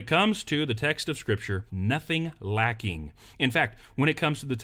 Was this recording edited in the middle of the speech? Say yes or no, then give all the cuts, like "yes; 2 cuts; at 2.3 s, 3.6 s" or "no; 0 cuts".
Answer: yes; 1 cut; at 1.7 s